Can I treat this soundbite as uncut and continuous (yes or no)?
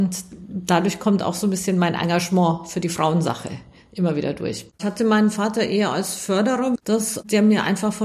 no